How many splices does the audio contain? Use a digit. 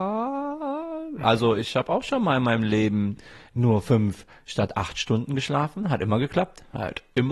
0